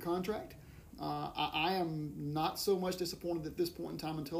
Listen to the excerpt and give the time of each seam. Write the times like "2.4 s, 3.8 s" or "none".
0.9 s